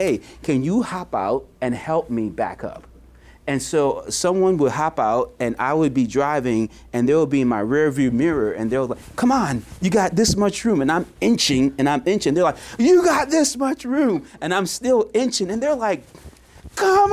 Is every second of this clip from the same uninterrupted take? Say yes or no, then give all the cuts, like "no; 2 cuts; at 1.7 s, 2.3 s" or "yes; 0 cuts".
no; 1 cut; at 1.6 s